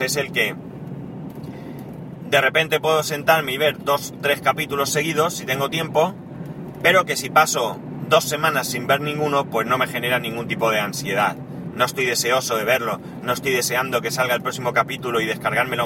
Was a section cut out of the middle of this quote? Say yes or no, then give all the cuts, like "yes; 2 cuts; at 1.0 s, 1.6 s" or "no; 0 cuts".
no; 0 cuts